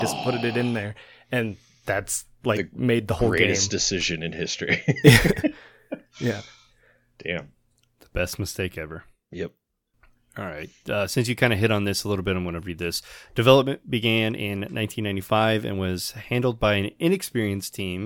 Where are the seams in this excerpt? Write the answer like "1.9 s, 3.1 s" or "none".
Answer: none